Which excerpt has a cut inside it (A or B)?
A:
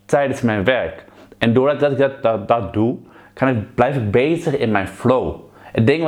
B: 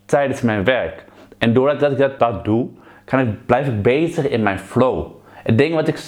B